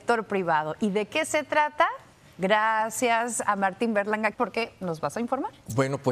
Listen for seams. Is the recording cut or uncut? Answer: cut